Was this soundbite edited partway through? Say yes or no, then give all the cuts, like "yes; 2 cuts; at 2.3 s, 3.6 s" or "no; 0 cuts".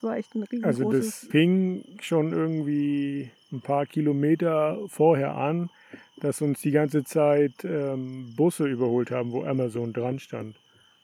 yes; 1 cut; at 1.3 s